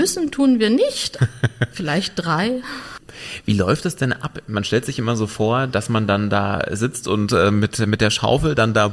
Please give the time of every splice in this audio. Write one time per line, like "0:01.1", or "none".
0:01.2